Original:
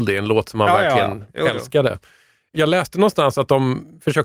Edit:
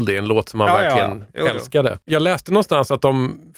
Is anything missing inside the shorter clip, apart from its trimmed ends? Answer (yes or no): yes